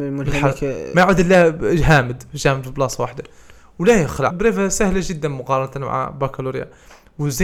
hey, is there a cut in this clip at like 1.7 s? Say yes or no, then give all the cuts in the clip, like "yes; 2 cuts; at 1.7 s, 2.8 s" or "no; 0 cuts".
no; 1 cut; at 4.3 s